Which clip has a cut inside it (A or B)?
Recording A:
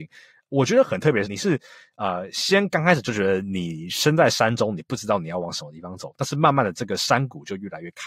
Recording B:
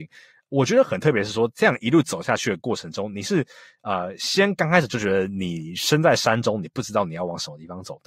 A